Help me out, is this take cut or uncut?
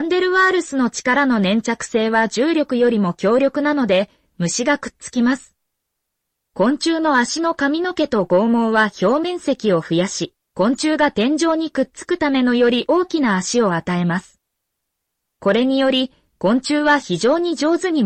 uncut